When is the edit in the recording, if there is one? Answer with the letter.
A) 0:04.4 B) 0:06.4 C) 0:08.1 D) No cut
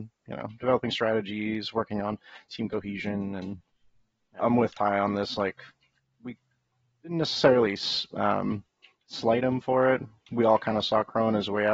A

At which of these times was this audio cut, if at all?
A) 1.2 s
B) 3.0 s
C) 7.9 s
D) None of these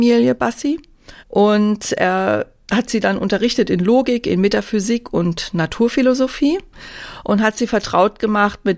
A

